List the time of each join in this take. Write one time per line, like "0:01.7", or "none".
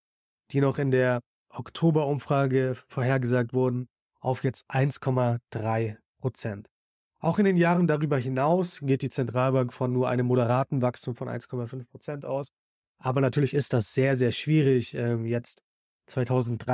none